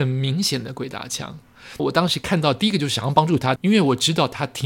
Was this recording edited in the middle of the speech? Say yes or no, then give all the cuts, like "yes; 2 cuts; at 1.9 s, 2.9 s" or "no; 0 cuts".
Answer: yes; 2 cuts; at 1.8 s, 3.6 s